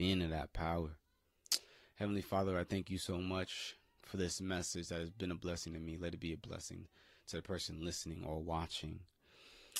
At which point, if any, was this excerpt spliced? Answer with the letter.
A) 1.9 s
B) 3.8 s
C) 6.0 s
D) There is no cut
D